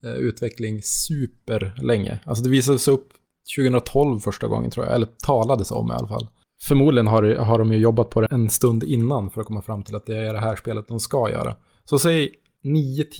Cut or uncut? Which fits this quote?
cut